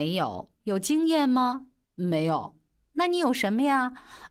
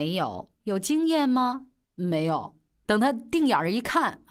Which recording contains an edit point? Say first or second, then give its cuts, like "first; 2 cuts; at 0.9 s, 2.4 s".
second; 1 cut; at 2.8 s